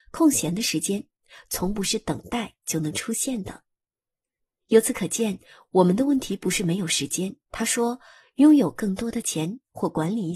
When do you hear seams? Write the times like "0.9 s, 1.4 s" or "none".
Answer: 7.5 s